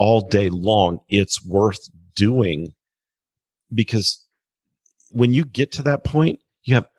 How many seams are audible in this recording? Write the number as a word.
one